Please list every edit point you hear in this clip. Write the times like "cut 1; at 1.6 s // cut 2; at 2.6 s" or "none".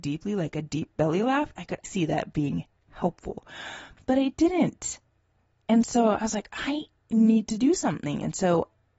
cut 1; at 1.8 s